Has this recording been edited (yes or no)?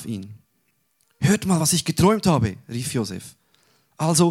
no